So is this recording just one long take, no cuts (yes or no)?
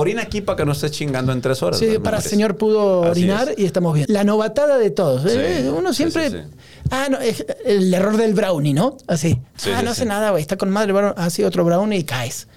no